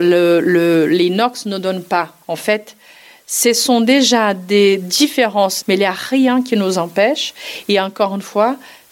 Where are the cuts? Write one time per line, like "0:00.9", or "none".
0:02.2
0:05.6